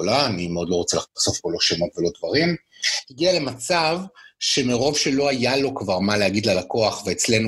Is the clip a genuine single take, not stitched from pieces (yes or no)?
yes